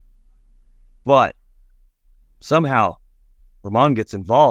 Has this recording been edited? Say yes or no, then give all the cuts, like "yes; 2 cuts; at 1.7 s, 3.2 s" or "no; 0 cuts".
no; 0 cuts